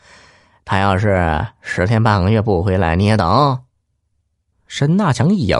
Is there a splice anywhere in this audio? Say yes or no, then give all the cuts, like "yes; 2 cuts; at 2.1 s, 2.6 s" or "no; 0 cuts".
no; 0 cuts